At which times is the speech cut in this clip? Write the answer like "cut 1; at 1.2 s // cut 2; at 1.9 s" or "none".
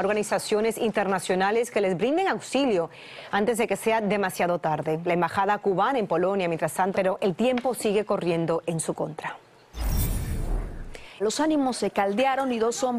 cut 1; at 6.9 s // cut 2; at 11.2 s